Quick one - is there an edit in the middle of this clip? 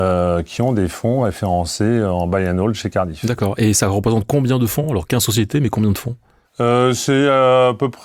no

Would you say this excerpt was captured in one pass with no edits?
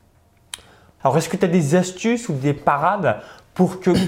no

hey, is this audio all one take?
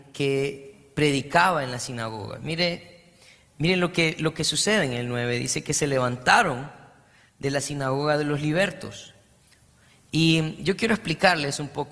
yes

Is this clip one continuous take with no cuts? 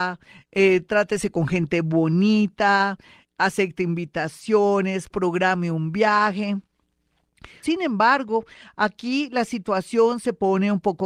no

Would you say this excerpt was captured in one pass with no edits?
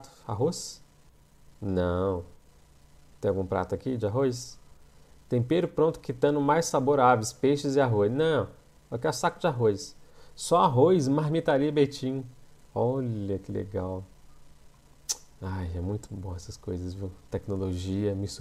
no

